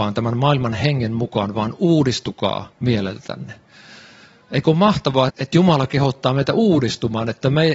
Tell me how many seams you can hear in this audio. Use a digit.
2